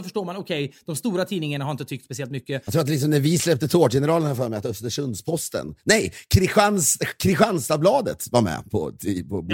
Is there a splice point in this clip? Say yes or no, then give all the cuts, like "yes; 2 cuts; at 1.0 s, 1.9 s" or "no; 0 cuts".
no; 0 cuts